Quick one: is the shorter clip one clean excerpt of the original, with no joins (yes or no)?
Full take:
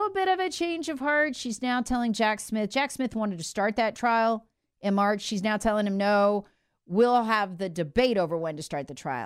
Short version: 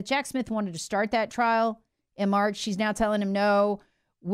yes